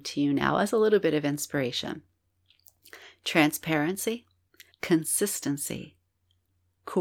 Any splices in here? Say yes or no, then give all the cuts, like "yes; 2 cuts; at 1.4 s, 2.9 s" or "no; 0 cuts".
yes; 1 cut; at 4.7 s